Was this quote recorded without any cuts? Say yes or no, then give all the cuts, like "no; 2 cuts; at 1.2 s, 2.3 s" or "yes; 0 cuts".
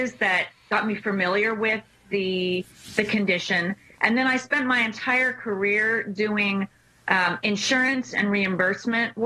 yes; 0 cuts